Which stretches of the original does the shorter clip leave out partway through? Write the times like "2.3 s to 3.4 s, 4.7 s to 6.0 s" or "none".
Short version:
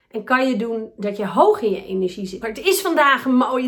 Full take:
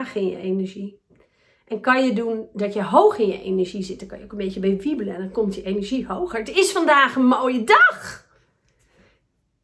4.0 s to 6.3 s